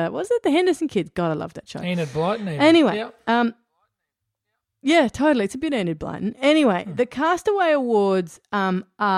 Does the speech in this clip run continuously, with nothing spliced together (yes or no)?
yes